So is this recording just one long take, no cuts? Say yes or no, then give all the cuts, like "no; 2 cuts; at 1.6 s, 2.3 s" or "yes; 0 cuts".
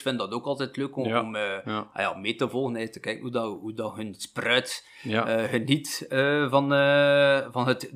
yes; 0 cuts